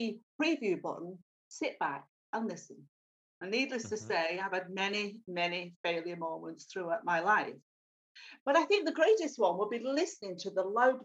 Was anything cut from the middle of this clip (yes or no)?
yes